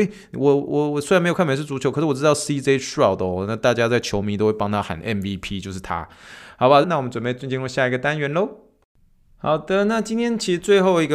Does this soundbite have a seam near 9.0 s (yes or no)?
no